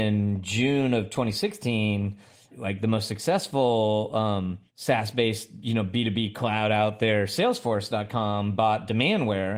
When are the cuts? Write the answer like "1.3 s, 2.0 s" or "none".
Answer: 2.5 s, 4.7 s